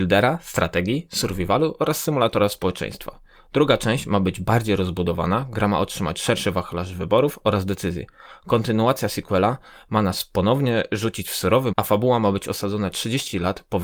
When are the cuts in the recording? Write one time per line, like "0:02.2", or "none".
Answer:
0:11.7